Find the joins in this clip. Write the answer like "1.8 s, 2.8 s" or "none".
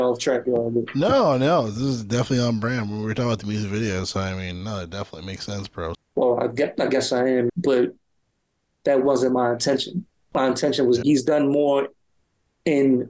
5.9 s, 7.5 s, 11.0 s